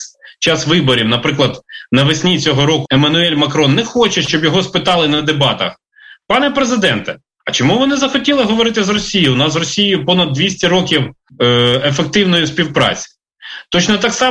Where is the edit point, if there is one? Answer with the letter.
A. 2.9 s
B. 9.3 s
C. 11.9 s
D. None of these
A